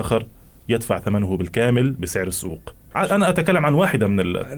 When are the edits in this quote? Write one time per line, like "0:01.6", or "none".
0:02.9